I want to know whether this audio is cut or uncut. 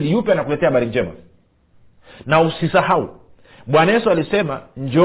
uncut